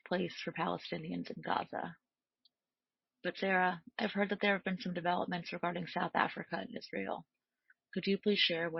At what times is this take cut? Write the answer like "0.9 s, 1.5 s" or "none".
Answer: none